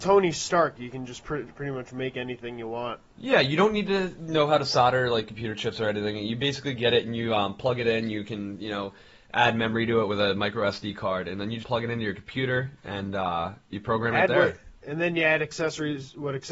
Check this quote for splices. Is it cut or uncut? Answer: cut